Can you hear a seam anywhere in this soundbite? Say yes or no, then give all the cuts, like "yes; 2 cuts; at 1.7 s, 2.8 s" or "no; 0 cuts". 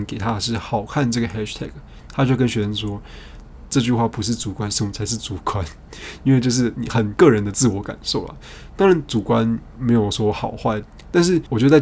yes; 1 cut; at 3.7 s